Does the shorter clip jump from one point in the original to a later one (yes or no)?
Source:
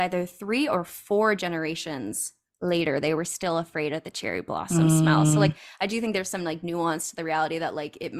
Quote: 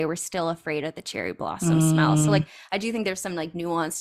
no